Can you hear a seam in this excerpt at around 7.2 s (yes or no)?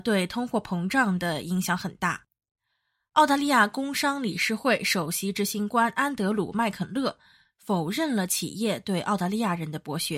no